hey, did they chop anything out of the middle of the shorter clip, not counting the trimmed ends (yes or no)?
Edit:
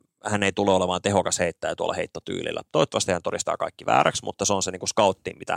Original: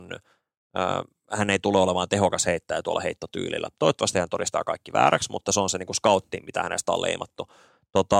no